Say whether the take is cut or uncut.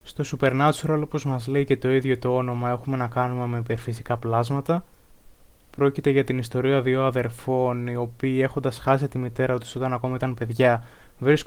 uncut